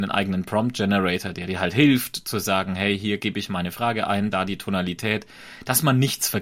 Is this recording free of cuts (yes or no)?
yes